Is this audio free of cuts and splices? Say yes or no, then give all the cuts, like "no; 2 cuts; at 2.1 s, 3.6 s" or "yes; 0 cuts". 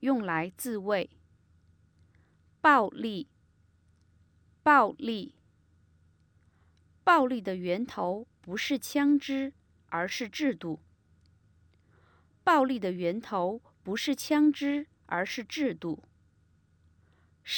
yes; 0 cuts